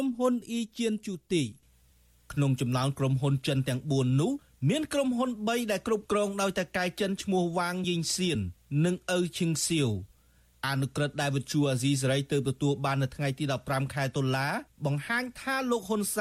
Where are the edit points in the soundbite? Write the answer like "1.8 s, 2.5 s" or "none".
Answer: none